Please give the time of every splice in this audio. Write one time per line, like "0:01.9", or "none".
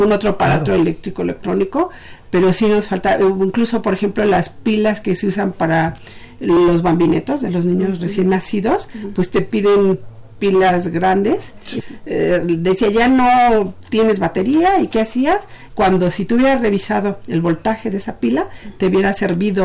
0:11.8
0:15.7